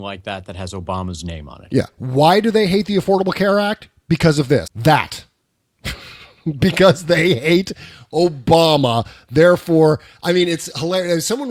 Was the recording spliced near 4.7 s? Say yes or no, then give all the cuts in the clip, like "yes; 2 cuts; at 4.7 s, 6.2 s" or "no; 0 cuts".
yes; 1 cut; at 4.7 s